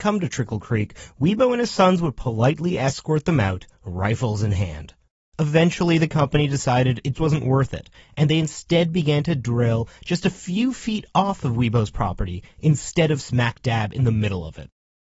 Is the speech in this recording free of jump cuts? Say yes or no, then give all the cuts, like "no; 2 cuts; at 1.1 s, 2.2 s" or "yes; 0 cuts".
no; 1 cut; at 7.1 s